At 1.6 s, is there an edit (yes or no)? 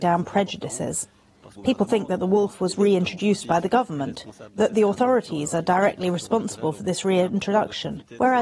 yes